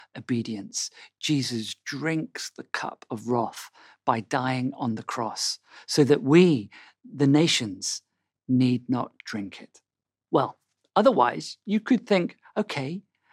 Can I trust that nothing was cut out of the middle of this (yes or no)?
no